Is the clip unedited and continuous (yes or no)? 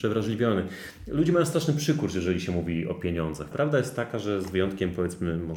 no